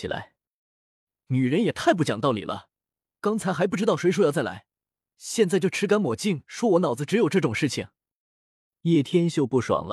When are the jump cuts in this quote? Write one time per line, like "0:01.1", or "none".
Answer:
none